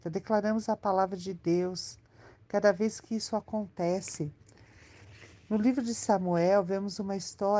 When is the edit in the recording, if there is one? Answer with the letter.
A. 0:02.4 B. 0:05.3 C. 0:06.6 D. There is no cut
D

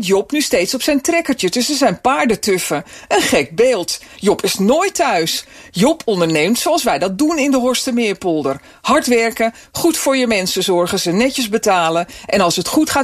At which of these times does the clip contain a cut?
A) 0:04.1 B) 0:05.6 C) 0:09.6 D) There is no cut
D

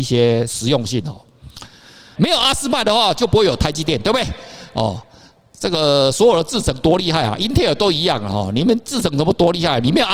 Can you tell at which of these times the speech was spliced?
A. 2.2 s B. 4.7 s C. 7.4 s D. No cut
A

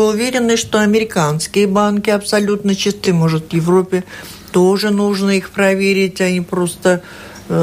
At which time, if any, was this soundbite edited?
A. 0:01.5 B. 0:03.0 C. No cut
C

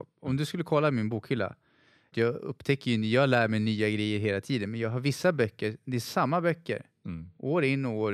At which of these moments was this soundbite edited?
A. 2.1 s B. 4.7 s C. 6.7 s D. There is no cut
A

